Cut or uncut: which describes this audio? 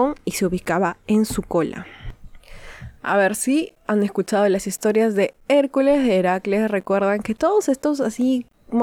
uncut